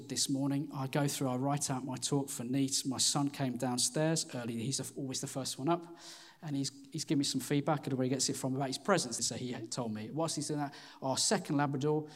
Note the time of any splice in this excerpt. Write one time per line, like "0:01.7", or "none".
0:09.2